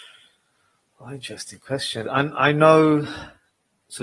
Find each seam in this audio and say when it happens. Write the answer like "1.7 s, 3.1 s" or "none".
2.0 s